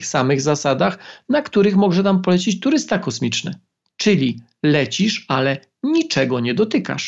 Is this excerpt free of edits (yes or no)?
yes